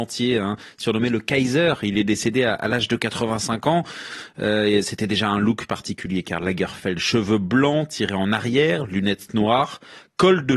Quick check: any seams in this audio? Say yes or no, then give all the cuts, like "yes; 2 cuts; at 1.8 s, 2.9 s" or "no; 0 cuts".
no; 0 cuts